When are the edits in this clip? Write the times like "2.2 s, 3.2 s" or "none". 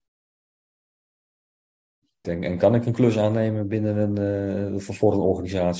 2.2 s